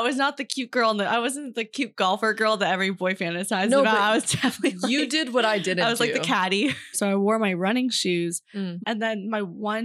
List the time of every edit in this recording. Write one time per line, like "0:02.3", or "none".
0:06.9
0:08.8